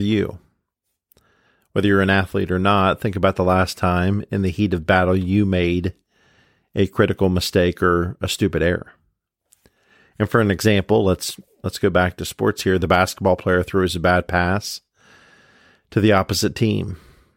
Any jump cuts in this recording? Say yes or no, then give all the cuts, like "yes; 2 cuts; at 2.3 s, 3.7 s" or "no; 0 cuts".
no; 0 cuts